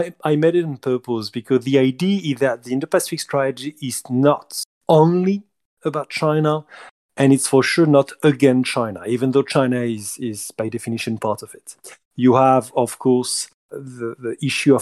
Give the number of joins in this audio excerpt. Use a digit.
2